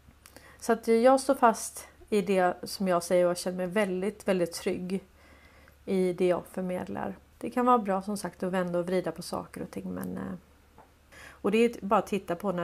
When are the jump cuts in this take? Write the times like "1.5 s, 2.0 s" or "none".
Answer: 7.3 s, 11.1 s